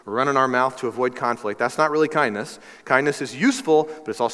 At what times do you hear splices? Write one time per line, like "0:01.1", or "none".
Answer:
none